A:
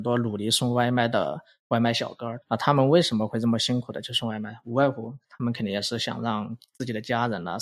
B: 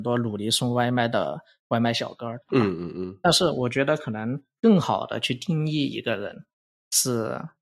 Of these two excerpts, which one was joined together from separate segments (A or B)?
B